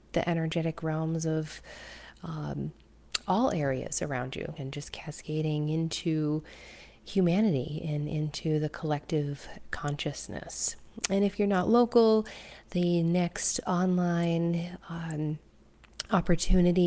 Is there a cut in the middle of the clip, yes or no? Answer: yes